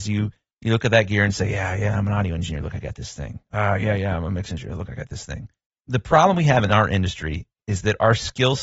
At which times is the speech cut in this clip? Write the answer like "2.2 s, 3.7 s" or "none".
none